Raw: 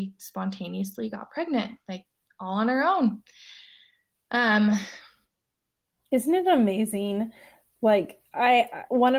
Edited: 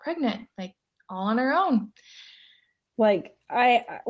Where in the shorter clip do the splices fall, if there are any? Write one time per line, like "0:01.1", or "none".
0:02.9